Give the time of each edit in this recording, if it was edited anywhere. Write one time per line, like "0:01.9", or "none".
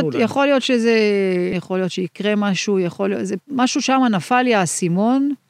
0:01.5